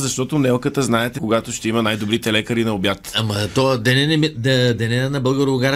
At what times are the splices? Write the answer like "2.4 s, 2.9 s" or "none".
1.2 s